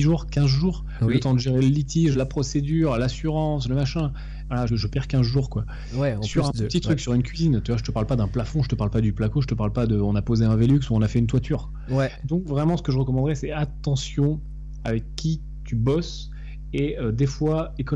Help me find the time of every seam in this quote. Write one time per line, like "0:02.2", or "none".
0:04.7